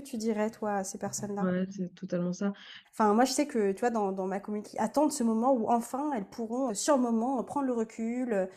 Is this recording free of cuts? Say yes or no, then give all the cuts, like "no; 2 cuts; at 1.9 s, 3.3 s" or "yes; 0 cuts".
no; 3 cuts; at 2.8 s, 4.6 s, 6.7 s